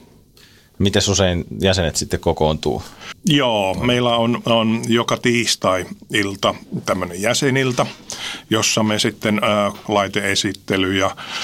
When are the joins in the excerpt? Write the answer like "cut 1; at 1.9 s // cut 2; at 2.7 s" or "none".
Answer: cut 1; at 3.1 s // cut 2; at 9.8 s